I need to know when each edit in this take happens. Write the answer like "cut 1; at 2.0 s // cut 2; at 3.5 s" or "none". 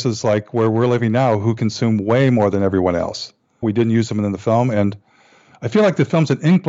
cut 1; at 3.6 s